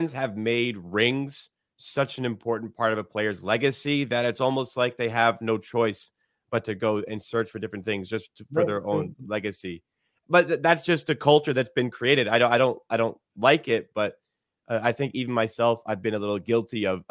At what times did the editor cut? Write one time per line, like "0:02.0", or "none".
none